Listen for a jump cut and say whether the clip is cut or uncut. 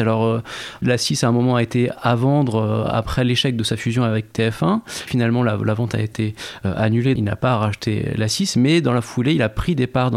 cut